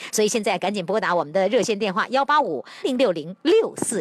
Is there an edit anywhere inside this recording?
yes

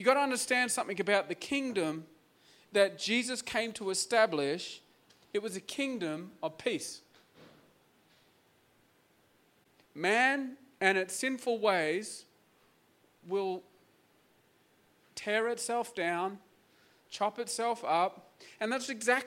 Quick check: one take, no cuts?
yes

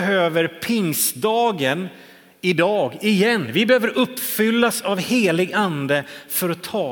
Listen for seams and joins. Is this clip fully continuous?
yes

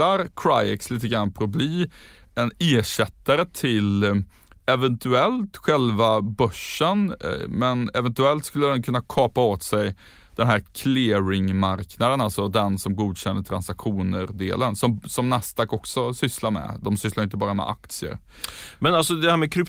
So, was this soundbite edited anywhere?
no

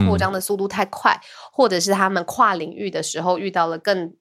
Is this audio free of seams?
yes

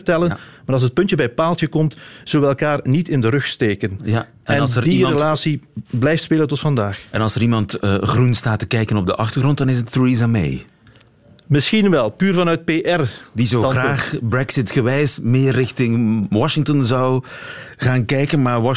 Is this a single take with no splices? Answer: yes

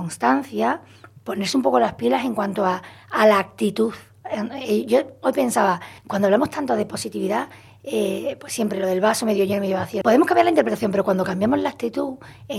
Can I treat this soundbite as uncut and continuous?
no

